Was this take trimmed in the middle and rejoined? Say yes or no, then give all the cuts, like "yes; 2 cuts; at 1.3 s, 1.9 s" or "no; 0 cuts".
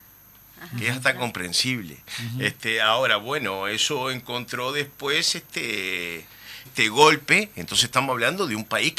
yes; 1 cut; at 6.7 s